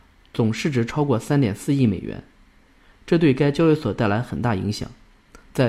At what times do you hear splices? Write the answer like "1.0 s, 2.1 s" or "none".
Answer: none